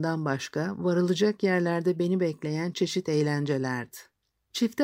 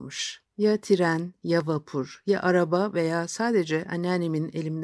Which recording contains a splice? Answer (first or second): first